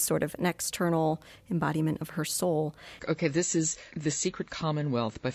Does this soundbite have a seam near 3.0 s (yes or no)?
yes